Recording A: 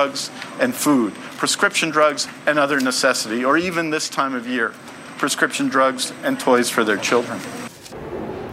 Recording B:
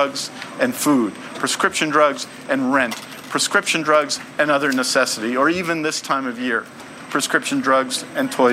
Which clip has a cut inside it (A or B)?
A